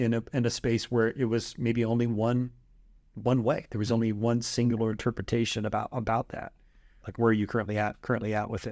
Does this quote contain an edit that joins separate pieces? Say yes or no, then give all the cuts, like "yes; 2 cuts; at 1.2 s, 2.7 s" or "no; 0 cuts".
yes; 1 cut; at 7.0 s